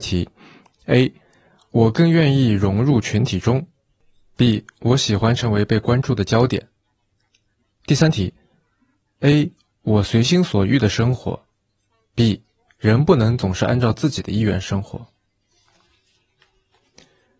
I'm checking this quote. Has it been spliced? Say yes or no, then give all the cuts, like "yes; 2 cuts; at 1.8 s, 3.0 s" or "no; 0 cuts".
no; 0 cuts